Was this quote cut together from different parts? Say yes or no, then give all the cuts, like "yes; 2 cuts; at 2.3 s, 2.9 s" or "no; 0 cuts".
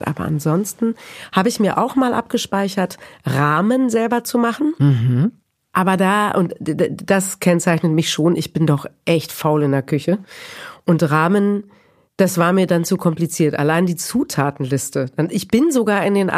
no; 0 cuts